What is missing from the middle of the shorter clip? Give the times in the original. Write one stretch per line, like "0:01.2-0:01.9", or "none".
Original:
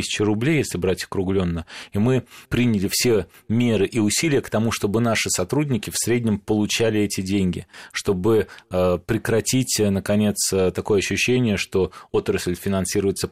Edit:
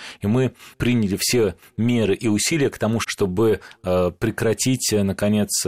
0:04.8-0:07.9